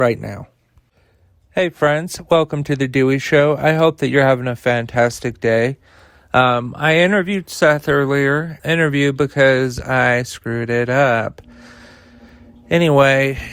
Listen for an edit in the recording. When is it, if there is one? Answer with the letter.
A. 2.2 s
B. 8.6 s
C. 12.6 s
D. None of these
B